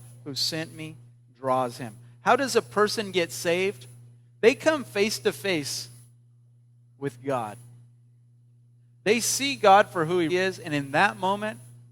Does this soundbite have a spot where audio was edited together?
yes; 1 cut; at 10.3 s

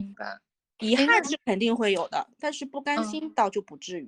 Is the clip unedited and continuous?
yes; 0 cuts

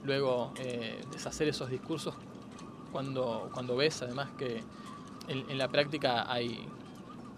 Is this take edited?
no; 0 cuts

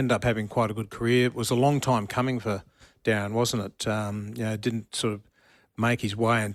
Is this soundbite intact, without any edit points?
yes; 0 cuts

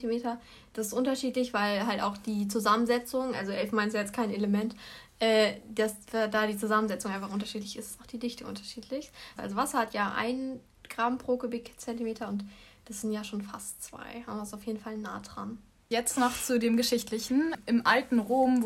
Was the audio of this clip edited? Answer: yes; 1 cut; at 9.4 s

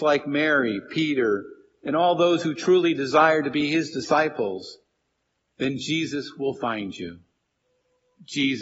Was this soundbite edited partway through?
no; 0 cuts

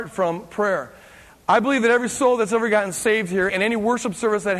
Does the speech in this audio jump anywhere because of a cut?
yes; 1 cut; at 3.5 s

